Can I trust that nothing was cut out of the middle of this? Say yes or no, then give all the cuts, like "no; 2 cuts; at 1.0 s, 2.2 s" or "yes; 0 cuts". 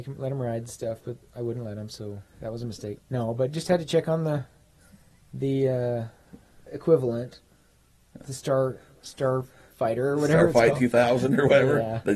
no; 2 cuts; at 3.0 s, 6.7 s